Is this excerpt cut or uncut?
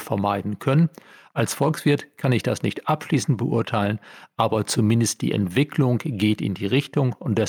uncut